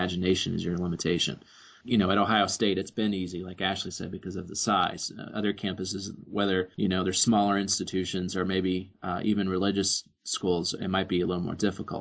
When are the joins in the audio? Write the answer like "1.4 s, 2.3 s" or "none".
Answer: none